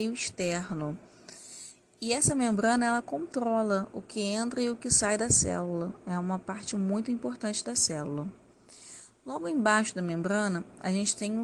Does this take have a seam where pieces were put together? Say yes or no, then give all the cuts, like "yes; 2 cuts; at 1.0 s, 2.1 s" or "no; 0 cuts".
no; 0 cuts